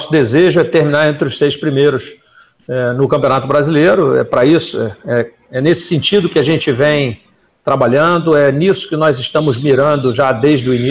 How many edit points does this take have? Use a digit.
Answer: 0